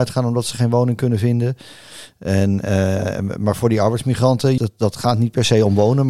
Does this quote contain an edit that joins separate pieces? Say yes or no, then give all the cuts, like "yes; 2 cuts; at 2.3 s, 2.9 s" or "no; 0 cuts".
yes; 1 cut; at 4.6 s